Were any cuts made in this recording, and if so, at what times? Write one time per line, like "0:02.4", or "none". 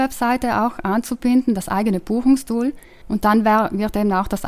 0:03.0